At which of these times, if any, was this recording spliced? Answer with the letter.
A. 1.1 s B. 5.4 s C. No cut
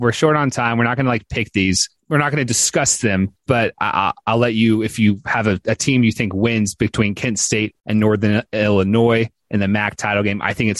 C